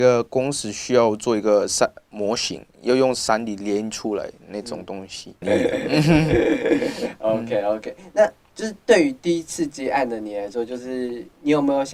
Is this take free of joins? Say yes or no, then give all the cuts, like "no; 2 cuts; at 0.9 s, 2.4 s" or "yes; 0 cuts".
no; 1 cut; at 5.4 s